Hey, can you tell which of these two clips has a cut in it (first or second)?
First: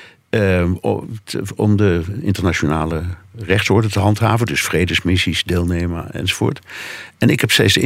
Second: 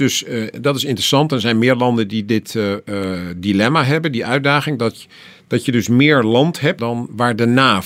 second